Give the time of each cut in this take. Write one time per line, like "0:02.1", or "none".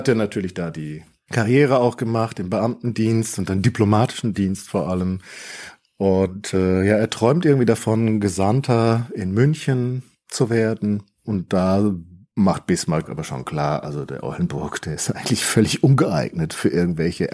none